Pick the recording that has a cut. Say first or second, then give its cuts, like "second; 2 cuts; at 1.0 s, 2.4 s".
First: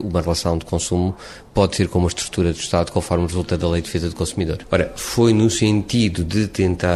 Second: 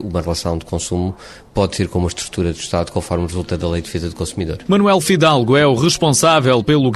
first; 1 cut; at 4.6 s